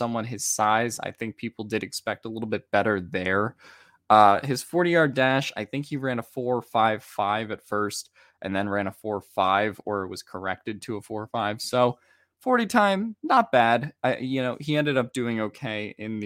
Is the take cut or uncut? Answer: uncut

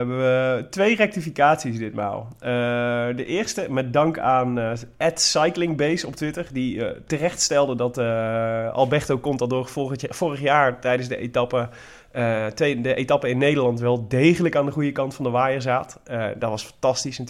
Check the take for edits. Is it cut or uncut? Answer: uncut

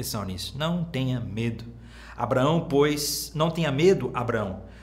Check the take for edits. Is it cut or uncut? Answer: uncut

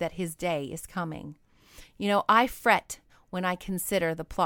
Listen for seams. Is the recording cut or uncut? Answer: uncut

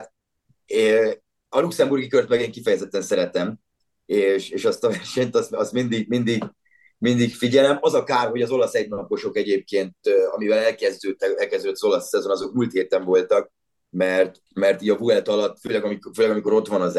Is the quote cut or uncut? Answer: cut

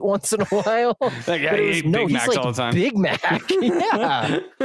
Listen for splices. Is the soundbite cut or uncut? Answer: uncut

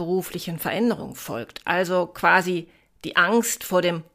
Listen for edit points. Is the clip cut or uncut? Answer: uncut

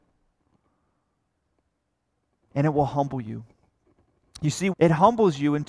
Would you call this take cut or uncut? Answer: cut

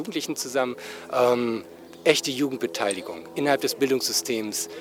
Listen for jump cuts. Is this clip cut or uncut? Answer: uncut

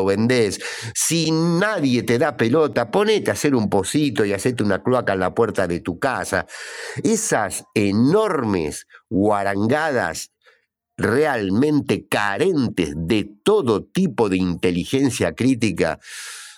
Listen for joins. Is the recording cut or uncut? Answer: uncut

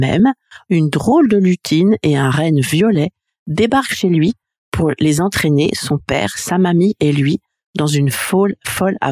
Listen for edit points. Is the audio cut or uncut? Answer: uncut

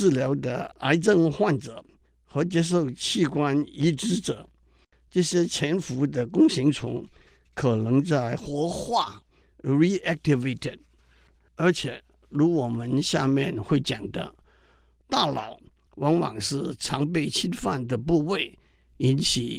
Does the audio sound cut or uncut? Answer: uncut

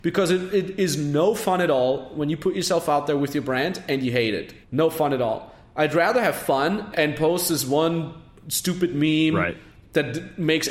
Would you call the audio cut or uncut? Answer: cut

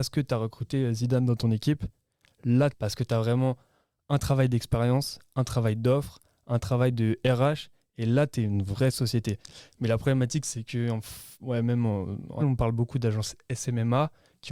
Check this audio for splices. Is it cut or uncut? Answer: cut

